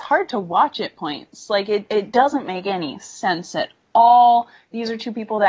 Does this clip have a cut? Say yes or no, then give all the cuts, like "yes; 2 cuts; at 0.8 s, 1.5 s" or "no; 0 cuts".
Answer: no; 0 cuts